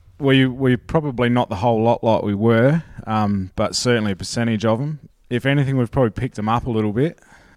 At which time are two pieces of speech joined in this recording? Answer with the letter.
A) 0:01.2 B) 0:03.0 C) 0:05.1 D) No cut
C